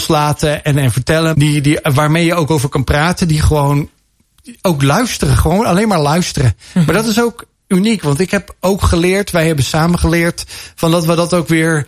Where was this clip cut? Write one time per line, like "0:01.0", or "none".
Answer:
0:01.3